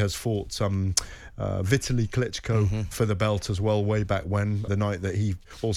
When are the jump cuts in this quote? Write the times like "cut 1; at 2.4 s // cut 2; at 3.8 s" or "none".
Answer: cut 1; at 4.7 s

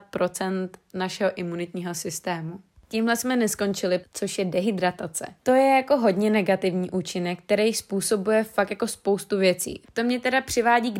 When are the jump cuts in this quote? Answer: cut 1; at 4.0 s // cut 2; at 5.4 s // cut 3; at 9.8 s

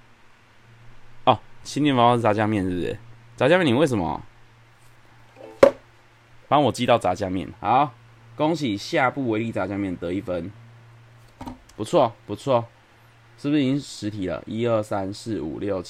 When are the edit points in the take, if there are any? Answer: cut 1; at 7.5 s // cut 2; at 12.2 s

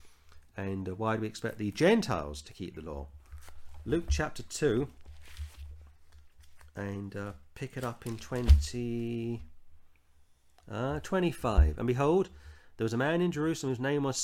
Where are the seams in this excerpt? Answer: none

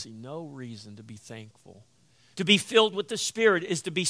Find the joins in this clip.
cut 1; at 2.3 s

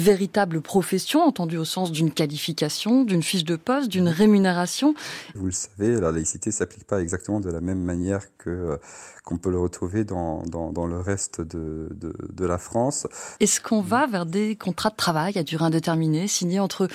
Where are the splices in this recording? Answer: cut 1; at 5.3 s // cut 2; at 13.4 s

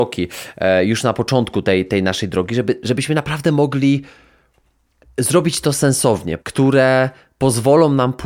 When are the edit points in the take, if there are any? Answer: cut 1; at 2.8 s // cut 2; at 6.4 s

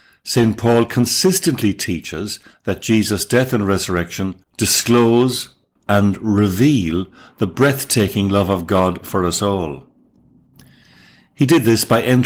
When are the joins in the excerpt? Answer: cut 1; at 4.4 s // cut 2; at 5.8 s

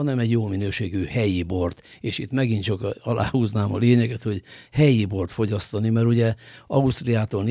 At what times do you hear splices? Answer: none

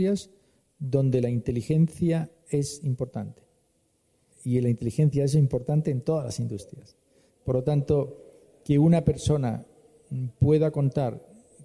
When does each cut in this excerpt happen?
none

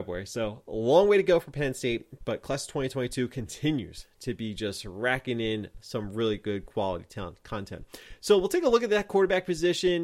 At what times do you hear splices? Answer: none

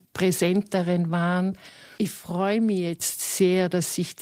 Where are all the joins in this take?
none

